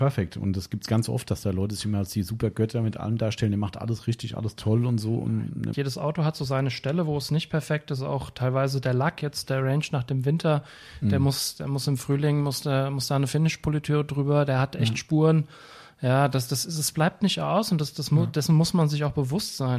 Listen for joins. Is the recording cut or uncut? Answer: cut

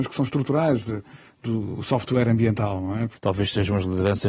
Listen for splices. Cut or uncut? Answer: uncut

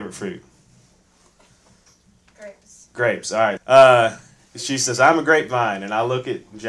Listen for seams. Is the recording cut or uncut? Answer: cut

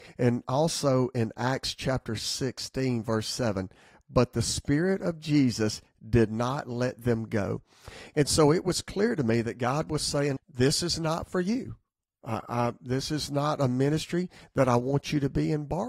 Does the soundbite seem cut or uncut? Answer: cut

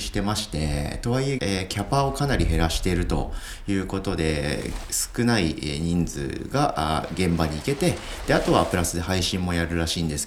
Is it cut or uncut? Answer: cut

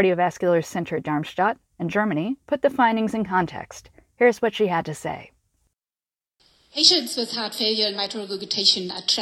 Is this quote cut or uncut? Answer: uncut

